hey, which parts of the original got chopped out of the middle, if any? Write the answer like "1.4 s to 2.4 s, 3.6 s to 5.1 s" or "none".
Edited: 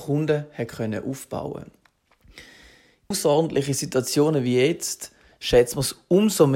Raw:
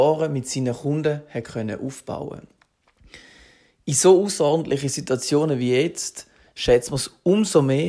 3.9 s to 4.3 s